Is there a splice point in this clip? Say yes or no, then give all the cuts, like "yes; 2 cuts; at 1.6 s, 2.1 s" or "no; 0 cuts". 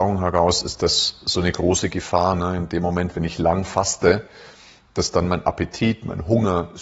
no; 0 cuts